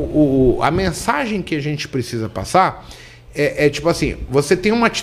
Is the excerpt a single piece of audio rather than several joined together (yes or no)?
yes